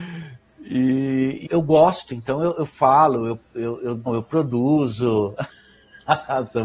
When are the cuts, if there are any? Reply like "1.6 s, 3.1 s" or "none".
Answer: 1.5 s, 4.1 s

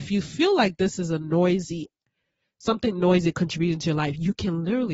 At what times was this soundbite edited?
none

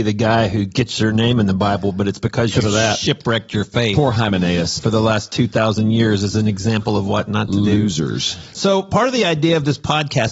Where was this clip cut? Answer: 4.8 s

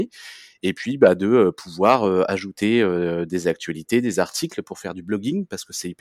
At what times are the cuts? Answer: none

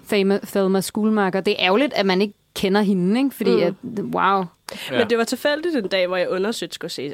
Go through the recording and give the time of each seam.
none

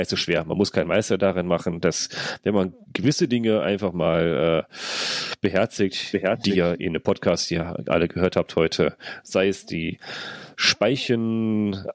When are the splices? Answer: none

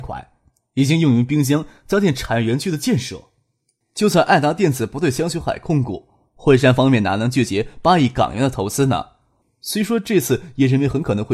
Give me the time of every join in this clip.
3.8 s, 9.4 s

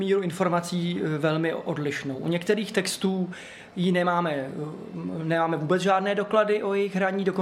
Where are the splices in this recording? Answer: none

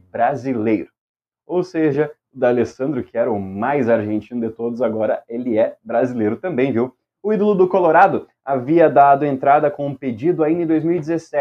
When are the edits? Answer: none

